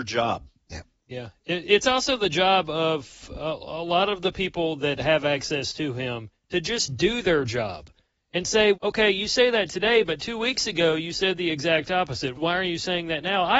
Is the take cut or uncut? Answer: cut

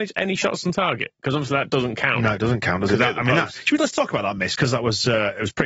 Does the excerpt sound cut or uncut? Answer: uncut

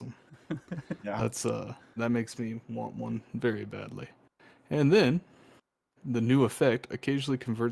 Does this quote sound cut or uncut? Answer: cut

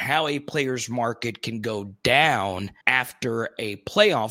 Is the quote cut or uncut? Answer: cut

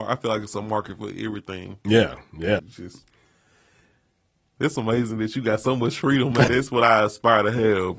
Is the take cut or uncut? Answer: cut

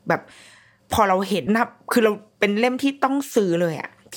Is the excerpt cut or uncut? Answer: cut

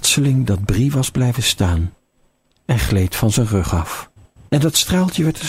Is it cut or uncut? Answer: cut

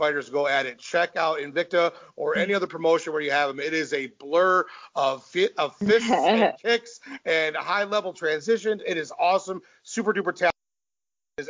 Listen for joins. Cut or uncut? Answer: uncut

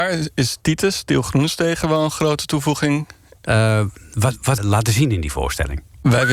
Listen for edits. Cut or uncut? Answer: cut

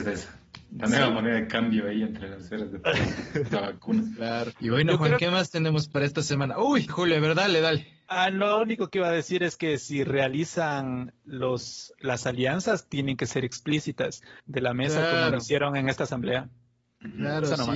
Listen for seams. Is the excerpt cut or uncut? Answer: cut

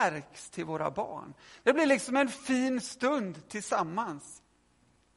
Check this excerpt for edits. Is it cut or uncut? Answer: uncut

